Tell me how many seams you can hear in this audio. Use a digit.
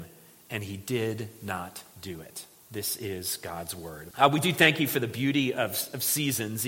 1